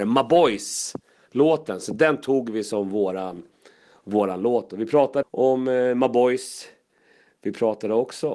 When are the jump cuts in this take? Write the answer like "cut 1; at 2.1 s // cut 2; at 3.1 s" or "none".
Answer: cut 1; at 5.2 s